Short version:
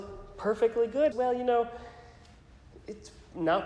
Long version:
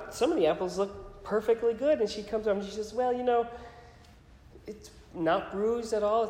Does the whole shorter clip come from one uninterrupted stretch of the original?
no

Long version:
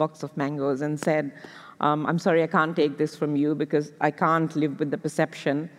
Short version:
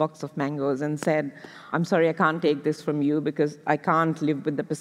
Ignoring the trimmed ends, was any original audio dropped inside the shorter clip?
yes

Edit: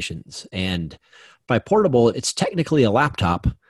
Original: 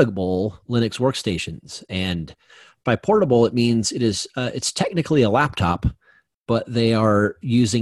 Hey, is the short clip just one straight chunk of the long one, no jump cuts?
no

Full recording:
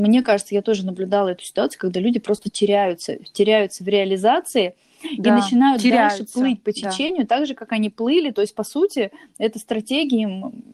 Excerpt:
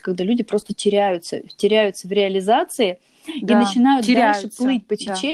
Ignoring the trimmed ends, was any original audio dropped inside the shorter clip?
no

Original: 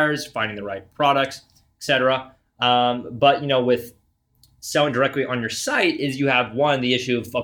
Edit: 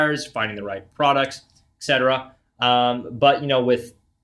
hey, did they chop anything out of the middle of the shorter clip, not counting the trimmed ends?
no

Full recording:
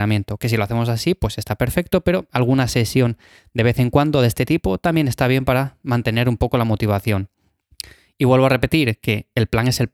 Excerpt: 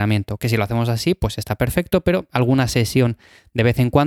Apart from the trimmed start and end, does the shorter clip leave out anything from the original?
no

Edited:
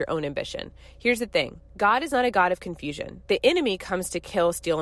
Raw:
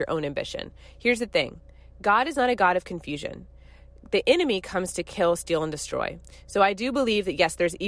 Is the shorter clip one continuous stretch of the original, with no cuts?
no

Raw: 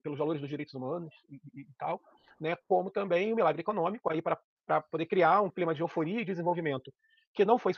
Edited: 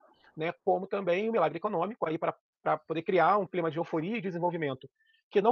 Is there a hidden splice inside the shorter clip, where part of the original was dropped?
no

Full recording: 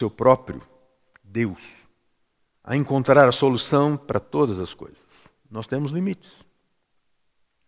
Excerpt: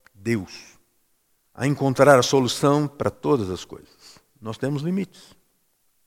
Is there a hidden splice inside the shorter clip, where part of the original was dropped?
no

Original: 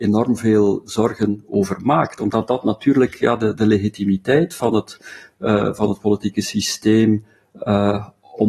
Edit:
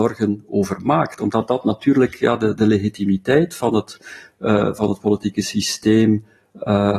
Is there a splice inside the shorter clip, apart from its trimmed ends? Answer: no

